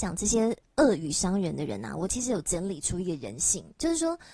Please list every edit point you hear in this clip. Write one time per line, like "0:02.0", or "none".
none